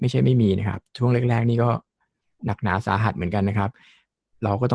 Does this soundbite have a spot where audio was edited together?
yes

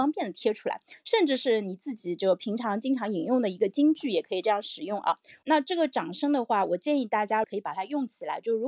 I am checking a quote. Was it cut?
yes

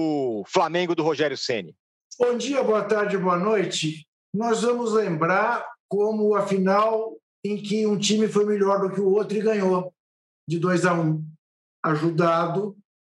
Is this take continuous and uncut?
yes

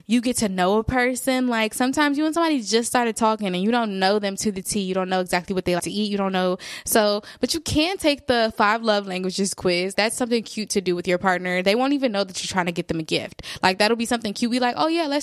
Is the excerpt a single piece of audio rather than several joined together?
no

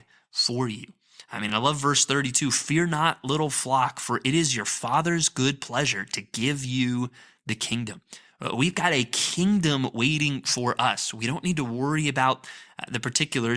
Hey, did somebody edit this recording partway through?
no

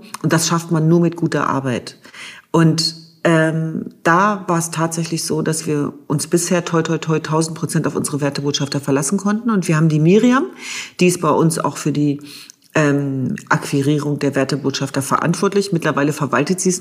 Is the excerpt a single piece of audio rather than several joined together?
yes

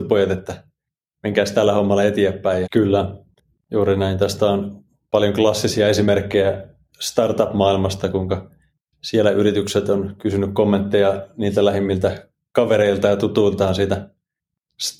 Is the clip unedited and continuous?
no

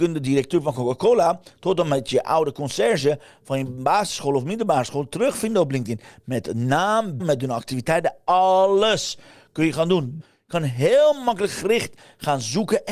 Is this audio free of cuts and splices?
no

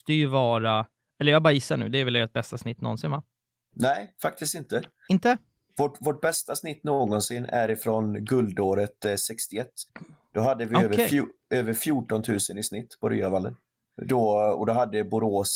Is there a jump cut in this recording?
no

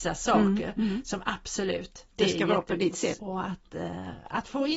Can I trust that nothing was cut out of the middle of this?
no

